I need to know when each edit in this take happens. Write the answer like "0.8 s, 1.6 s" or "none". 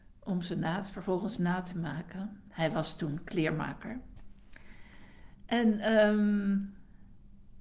none